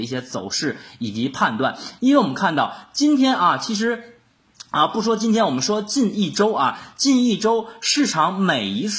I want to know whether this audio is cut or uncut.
uncut